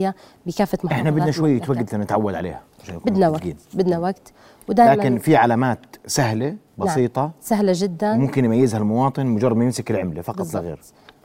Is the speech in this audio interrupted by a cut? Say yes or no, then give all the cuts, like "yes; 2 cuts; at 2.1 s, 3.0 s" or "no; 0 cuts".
yes; 1 cut; at 6.7 s